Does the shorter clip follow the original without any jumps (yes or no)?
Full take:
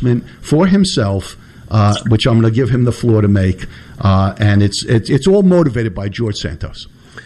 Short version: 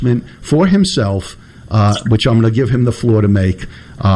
yes